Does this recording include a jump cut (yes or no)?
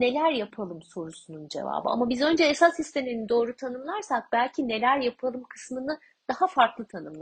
no